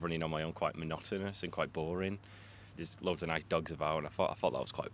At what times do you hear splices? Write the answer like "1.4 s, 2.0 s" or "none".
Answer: 2.7 s

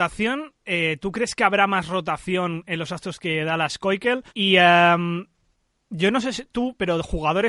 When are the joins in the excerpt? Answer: 4.3 s

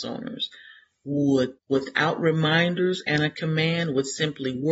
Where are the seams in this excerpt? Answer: 1.6 s

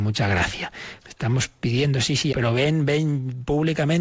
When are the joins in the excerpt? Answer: 1.0 s, 2.3 s

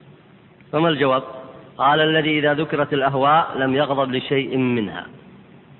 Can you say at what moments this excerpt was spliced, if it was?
1.7 s

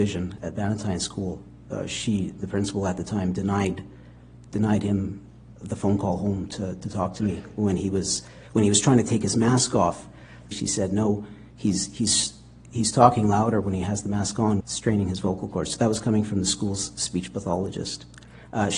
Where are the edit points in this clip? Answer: 10.5 s, 14.6 s

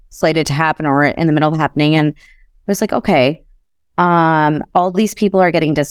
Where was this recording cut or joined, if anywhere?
none

